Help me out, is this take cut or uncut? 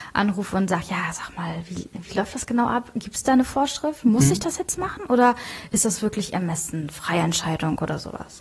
uncut